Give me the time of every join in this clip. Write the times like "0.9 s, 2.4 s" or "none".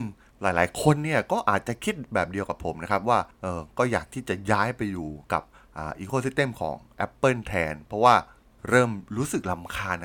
none

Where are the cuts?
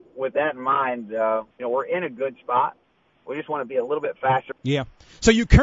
1.5 s, 4.5 s

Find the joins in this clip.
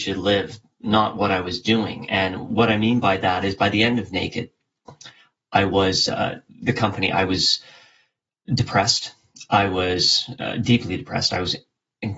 none

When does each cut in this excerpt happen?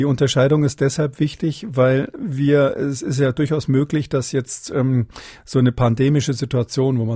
none

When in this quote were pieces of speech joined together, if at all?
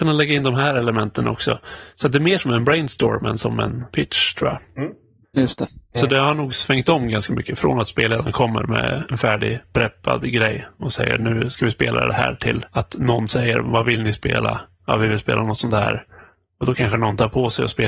5.2 s

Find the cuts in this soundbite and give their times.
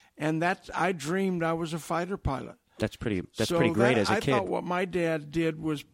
none

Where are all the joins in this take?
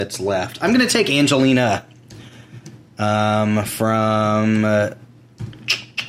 none

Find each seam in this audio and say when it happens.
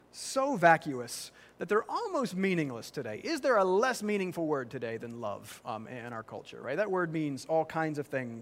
none

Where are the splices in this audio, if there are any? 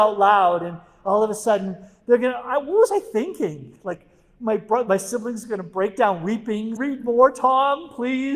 6.8 s

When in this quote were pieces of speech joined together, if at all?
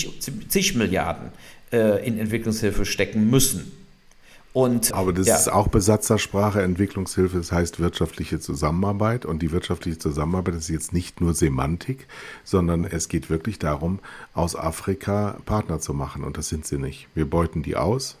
4.9 s

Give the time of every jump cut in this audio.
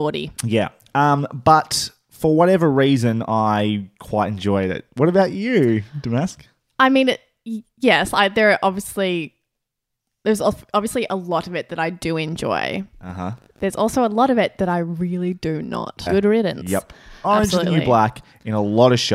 16.1 s, 17.2 s

